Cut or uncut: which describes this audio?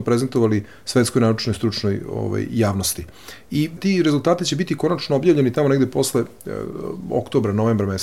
uncut